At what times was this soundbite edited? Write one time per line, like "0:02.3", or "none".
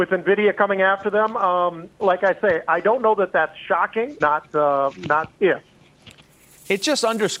0:04.2